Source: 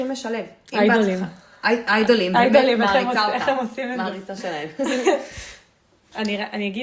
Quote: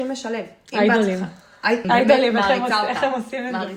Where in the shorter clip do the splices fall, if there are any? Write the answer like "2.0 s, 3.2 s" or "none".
1.8 s